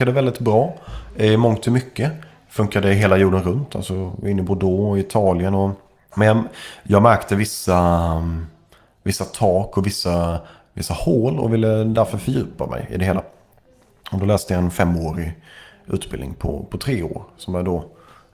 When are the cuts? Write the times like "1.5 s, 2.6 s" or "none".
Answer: none